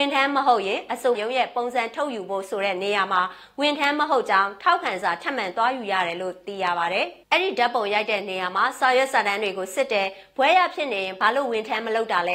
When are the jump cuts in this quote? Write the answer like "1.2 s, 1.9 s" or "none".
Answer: 1.1 s, 7.2 s